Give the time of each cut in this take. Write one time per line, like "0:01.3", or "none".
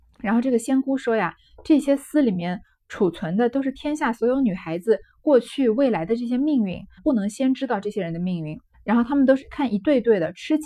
0:07.0
0:08.7